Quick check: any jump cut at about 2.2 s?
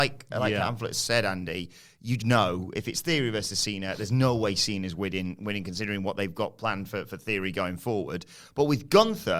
yes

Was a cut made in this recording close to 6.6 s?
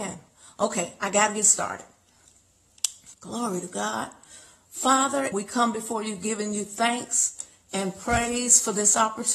no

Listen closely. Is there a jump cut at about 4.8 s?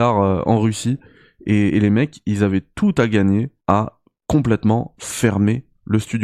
no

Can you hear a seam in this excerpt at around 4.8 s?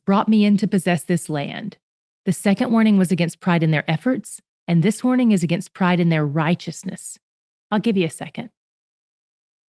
no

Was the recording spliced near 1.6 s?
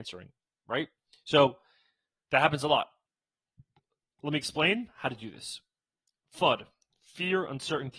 no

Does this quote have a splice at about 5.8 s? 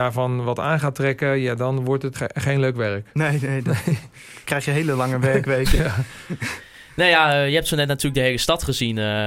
yes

